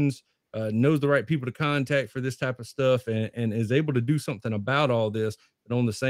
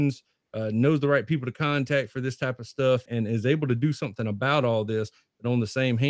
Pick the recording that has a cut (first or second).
second